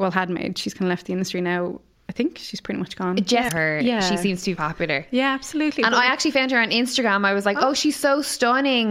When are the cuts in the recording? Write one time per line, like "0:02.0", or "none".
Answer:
0:03.5
0:04.6